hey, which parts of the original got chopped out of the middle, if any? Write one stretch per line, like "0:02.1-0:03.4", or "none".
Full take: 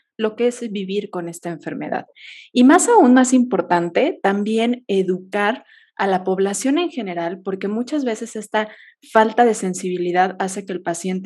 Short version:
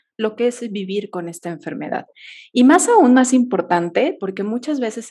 0:04.2-0:07.4